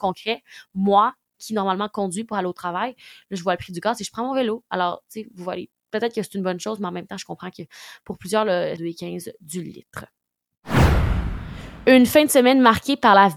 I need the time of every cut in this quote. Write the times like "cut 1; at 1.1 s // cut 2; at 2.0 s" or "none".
cut 1; at 8.8 s